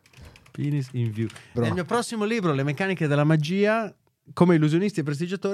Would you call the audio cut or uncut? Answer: cut